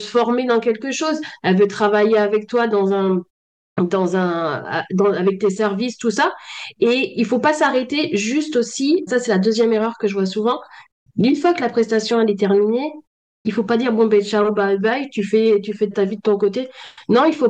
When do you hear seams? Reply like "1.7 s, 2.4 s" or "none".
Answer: 9.1 s, 15.9 s